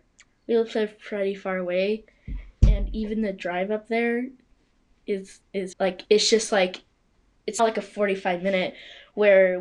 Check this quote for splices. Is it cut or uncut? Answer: cut